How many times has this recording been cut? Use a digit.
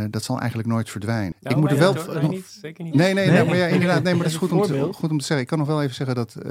1